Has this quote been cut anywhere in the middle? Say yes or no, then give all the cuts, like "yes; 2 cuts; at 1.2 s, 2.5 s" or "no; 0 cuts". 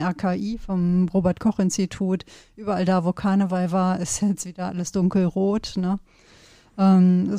no; 0 cuts